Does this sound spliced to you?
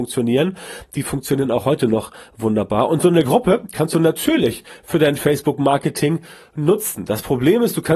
no; 0 cuts

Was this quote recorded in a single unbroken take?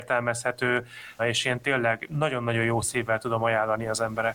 no; 1 cut; at 1.2 s

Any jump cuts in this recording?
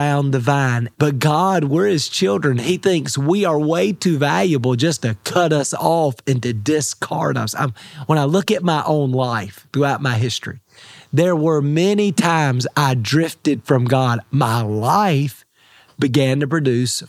yes; 2 cuts; at 0.9 s, 14.2 s

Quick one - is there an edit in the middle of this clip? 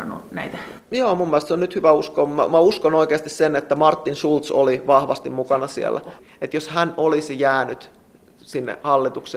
no; 0 cuts

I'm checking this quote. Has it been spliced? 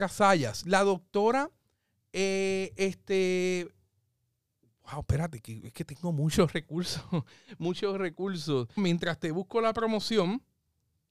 yes; 1 cut; at 8.8 s

